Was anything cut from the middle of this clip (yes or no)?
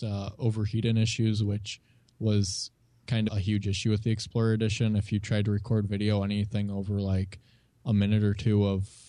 yes